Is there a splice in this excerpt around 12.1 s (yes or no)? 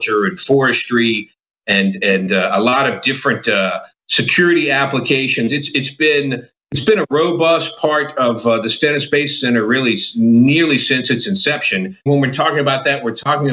yes